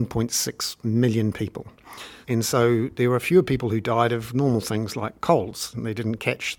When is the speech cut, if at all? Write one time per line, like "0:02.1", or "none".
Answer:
0:02.2